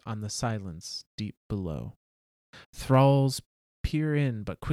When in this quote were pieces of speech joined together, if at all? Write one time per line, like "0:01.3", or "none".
0:02.6